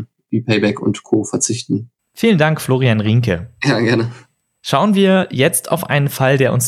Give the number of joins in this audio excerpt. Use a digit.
0